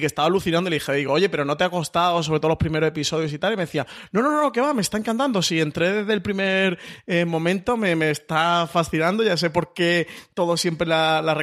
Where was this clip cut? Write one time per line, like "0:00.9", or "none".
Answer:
none